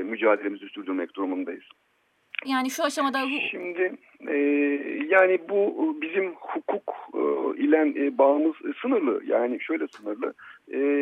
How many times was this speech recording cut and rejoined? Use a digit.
1